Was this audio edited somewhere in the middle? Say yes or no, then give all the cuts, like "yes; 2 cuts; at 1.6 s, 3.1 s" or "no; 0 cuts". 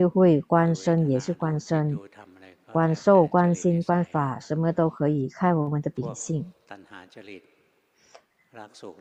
no; 0 cuts